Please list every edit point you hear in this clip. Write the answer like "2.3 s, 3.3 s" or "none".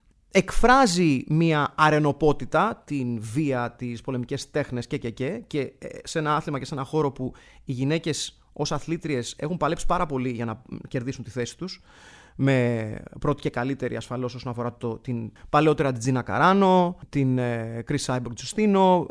15.4 s